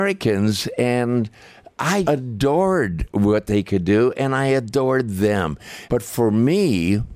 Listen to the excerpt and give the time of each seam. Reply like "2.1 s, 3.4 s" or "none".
2.1 s, 5.9 s